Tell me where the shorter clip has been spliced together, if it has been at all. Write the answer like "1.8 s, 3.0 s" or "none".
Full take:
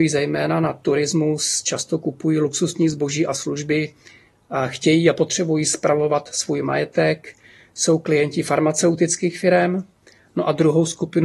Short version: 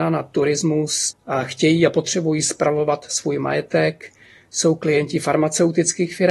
1.1 s